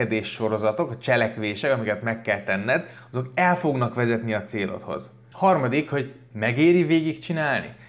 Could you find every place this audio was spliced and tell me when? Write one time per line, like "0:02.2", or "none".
0:05.3